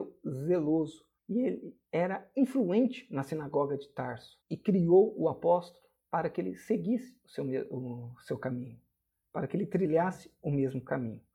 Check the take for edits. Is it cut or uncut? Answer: cut